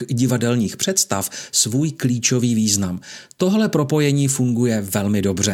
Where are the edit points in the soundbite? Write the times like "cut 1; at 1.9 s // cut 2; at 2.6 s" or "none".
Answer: none